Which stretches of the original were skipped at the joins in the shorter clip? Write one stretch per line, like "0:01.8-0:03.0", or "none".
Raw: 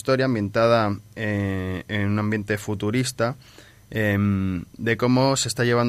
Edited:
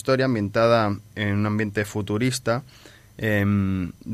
0:01.1-0:01.8